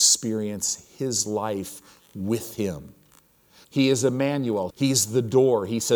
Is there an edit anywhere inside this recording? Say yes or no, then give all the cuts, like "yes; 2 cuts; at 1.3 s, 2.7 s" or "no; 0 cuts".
yes; 2 cuts; at 3.6 s, 4.7 s